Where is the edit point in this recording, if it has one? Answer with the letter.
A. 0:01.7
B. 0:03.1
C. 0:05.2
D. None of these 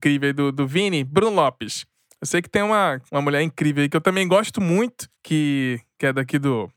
B